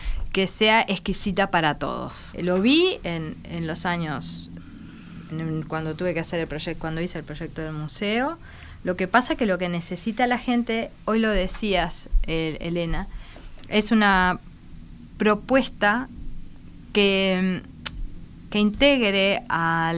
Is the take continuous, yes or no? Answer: no